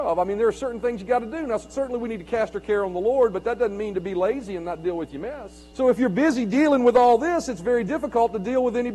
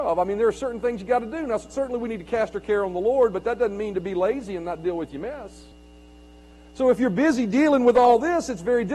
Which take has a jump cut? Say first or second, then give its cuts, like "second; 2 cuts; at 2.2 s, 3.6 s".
first; 1 cut; at 5.7 s